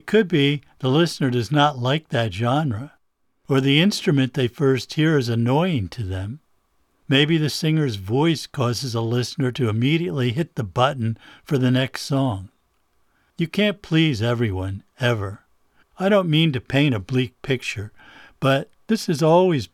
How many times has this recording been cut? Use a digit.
1